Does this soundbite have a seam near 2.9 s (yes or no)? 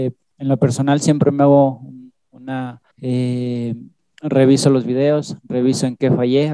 yes